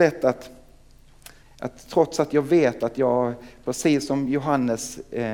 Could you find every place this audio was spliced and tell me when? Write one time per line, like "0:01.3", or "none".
0:01.4